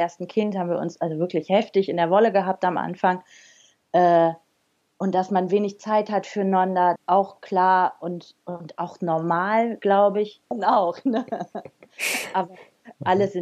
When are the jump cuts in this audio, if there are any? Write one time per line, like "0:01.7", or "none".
0:07.0
0:10.5